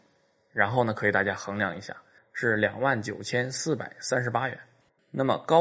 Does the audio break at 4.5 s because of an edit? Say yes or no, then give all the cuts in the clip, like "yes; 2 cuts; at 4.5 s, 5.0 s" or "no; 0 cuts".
no; 1 cut; at 2.2 s